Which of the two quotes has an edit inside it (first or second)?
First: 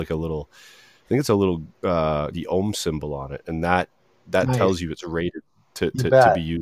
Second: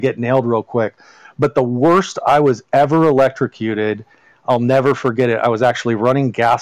first